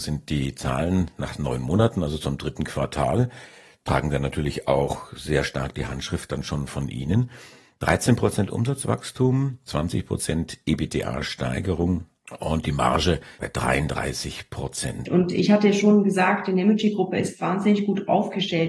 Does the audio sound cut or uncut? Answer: cut